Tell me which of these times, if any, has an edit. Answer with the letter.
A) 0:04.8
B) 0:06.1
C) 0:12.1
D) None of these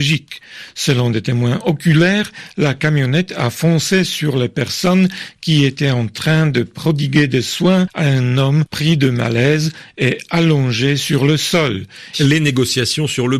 C